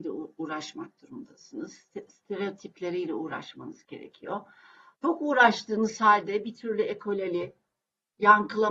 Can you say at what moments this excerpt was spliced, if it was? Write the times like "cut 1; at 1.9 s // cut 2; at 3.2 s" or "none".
none